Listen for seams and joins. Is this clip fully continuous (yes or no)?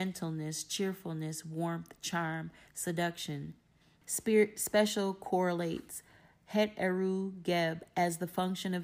no